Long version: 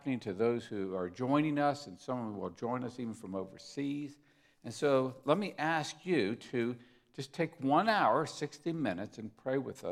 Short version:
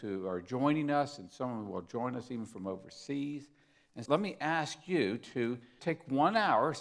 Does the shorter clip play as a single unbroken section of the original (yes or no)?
no